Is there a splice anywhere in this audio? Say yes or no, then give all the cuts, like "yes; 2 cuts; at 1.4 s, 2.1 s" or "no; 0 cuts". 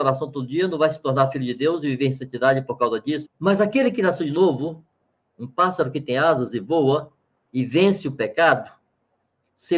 yes; 1 cut; at 3.2 s